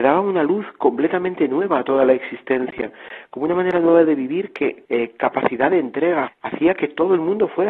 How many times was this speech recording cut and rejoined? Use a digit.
2